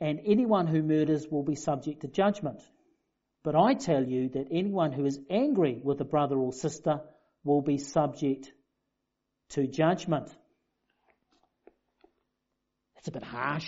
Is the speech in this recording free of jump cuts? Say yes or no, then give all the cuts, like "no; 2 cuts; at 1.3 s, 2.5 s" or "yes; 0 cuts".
yes; 0 cuts